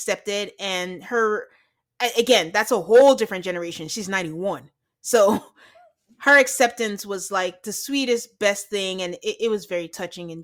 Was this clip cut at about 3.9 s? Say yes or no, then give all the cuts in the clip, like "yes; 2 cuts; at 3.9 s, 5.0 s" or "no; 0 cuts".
no; 0 cuts